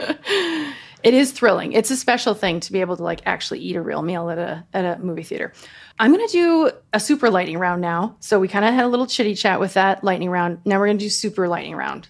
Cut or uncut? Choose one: uncut